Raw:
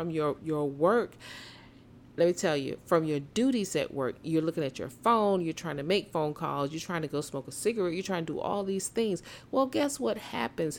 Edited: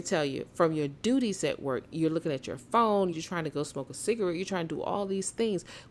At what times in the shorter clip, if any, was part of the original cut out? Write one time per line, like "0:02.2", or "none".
0:03.1